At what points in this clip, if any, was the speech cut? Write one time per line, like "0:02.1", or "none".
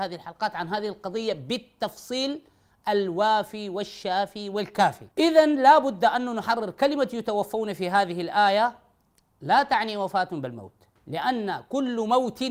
0:05.1
0:11.0